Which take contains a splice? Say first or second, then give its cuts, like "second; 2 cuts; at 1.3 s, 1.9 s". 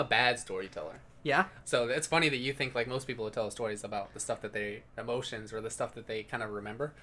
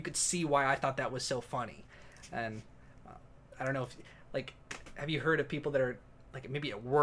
first; 2 cuts; at 1.6 s, 4.9 s